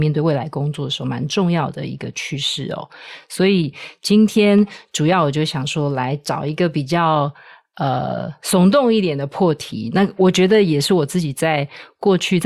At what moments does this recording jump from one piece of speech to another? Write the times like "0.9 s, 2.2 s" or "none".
none